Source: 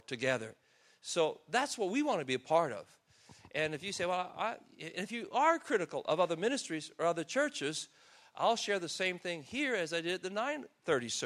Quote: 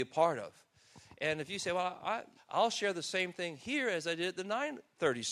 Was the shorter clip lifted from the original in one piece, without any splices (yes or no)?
no